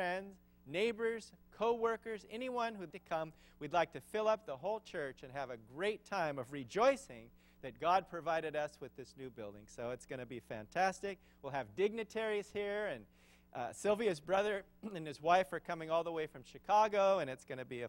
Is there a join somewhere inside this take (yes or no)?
yes